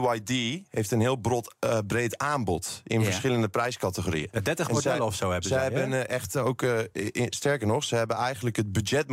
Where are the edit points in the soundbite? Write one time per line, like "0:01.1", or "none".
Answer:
none